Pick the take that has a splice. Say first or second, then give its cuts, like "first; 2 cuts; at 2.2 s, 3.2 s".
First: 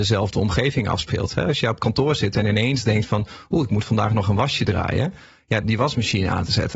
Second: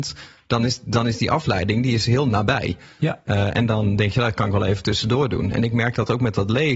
first; 1 cut; at 5.6 s